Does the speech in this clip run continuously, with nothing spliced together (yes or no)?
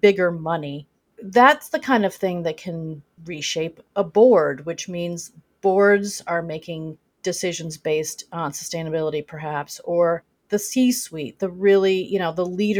yes